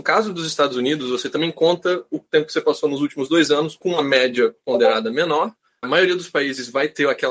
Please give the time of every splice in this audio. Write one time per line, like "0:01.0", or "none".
0:05.8